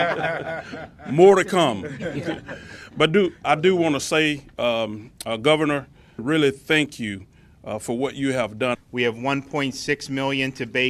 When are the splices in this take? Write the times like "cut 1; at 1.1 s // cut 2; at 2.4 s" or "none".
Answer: cut 1; at 6.2 s // cut 2; at 8.7 s